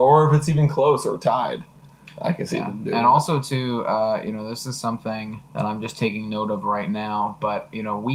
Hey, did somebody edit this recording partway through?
yes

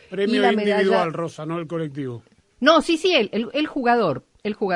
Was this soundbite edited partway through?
no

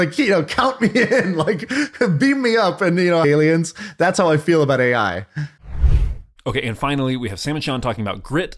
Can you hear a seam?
yes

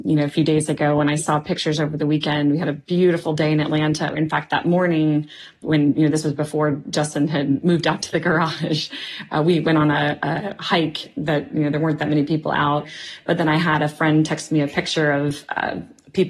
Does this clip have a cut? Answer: no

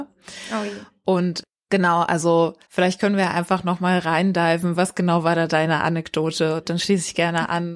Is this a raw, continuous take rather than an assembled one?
no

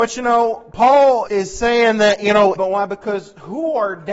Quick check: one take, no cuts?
no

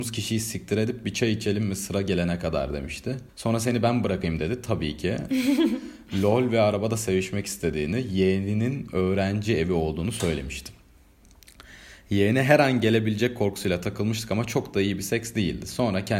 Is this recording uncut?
no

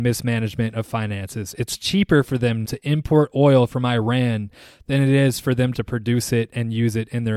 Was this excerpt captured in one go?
no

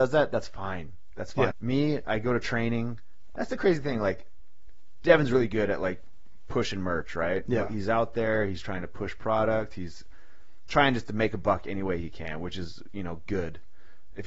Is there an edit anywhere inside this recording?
yes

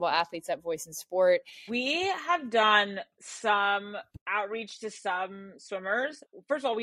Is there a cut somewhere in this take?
yes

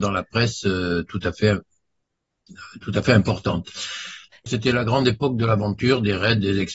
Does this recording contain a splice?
yes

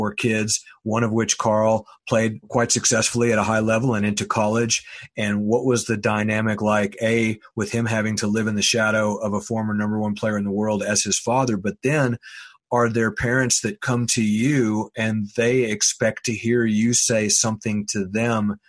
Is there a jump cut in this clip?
no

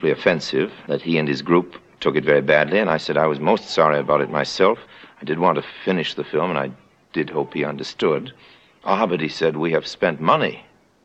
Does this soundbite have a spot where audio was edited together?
no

